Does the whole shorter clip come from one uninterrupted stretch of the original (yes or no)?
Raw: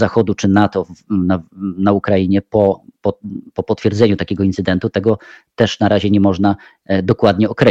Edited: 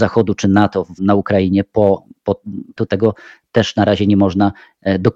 no